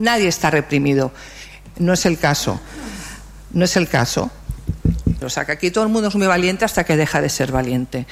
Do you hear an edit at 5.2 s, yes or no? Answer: yes